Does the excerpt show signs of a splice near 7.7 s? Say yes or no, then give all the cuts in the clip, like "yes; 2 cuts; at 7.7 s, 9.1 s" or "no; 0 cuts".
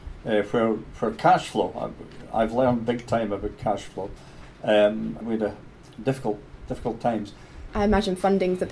yes; 2 cuts; at 5.2 s, 7.7 s